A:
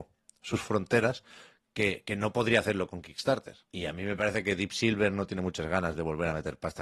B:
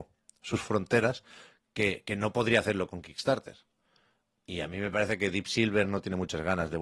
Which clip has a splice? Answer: A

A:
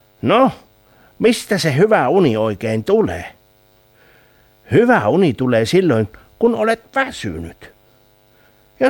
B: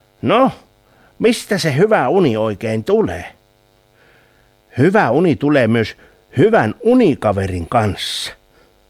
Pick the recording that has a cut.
B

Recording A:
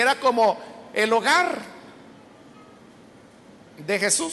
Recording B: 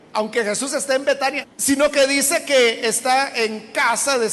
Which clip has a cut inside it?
B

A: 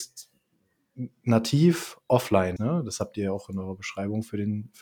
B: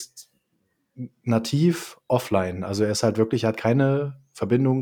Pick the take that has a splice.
A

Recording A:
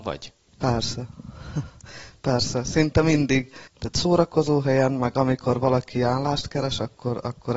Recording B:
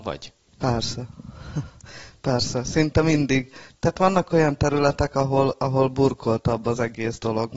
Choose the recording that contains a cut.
A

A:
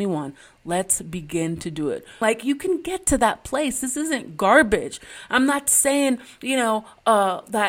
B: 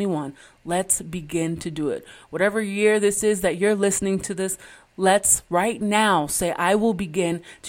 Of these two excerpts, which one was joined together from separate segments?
A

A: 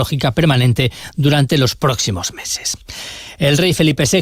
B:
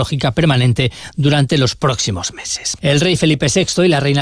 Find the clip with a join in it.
B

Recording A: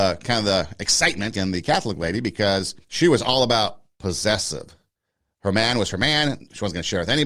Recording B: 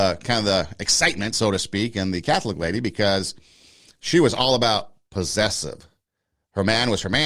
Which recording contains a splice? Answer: A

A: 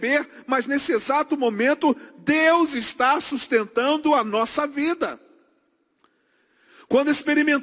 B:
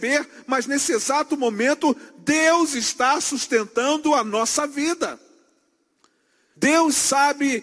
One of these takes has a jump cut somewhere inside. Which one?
B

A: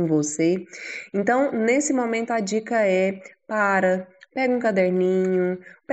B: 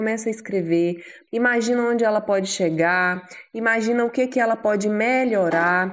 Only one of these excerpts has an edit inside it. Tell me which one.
B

